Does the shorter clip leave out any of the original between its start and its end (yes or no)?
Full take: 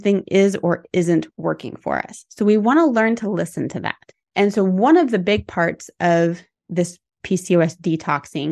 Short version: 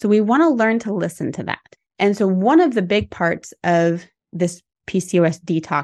no